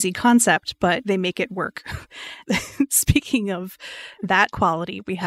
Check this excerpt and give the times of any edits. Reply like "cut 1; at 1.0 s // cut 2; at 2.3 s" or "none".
none